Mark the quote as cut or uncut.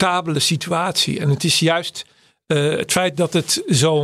uncut